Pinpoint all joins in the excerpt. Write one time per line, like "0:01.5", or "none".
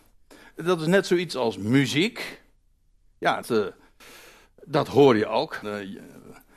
0:03.4
0:05.6